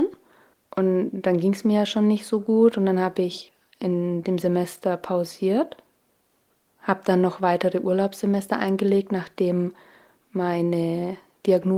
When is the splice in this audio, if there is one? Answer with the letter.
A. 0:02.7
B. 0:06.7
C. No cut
C